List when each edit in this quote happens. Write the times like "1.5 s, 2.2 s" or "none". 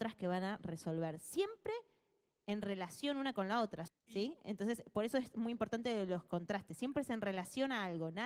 3.9 s

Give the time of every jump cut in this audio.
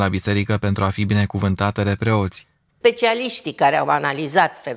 2.7 s

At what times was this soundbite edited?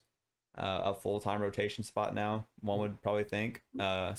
none

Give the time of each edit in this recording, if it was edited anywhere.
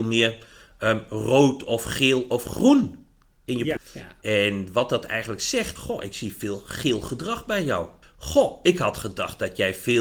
3.8 s, 5.8 s, 8.0 s

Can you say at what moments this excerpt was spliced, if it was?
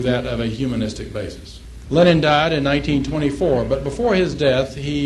1.8 s

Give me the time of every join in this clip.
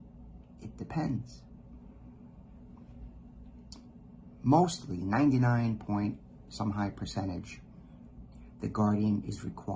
none

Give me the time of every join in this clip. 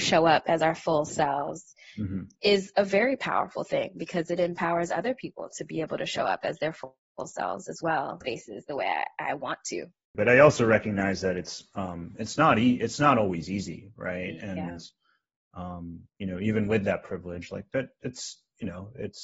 8.2 s, 10.1 s

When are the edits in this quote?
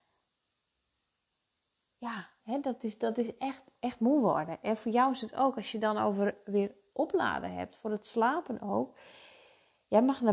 2.4 s

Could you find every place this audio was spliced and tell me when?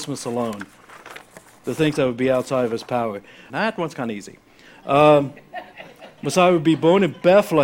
3.5 s

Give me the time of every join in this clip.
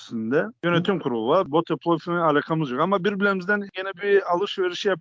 1.4 s

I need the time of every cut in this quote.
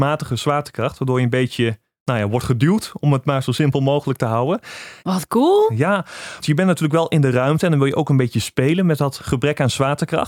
5.0 s, 6.4 s

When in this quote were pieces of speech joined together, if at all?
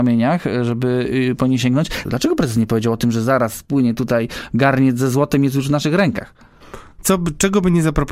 2.0 s, 7.0 s

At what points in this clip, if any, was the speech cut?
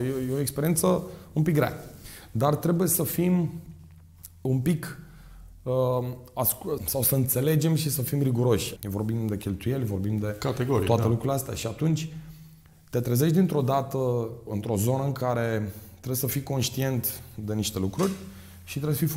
6.8 s, 8.8 s, 14.5 s

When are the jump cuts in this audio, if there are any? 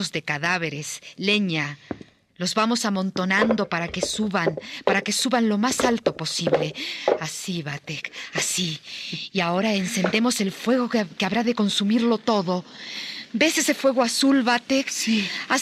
none

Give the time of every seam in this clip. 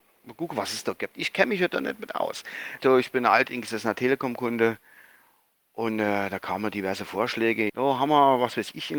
2.8 s, 7.7 s

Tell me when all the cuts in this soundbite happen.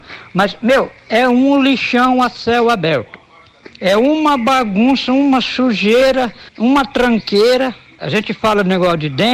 6.5 s

